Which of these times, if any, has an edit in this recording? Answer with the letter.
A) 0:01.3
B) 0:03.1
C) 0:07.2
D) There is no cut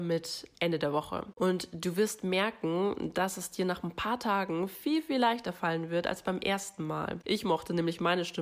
C